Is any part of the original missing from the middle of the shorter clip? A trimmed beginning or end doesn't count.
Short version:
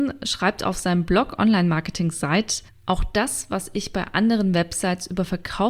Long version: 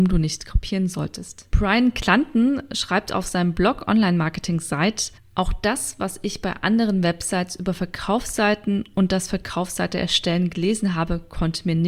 no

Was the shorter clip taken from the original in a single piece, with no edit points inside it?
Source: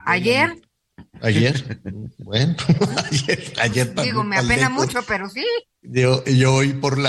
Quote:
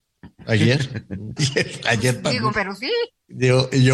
no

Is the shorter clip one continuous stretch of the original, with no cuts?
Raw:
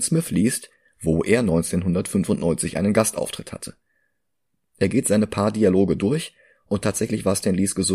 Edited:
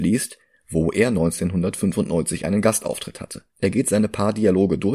no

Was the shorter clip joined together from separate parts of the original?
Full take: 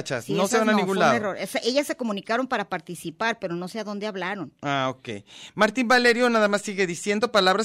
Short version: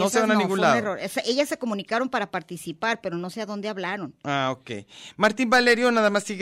no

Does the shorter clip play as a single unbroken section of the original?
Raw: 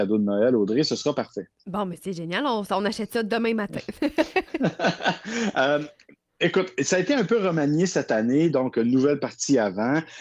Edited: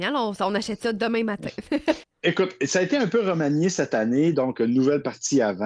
no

